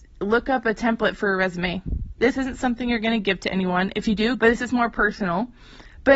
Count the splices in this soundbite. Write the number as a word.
two